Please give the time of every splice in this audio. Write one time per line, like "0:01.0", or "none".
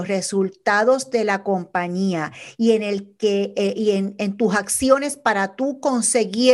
none